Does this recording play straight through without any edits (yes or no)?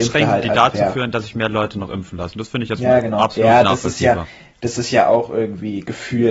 yes